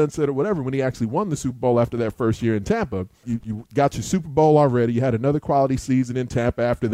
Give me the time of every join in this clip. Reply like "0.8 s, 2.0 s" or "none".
3.2 s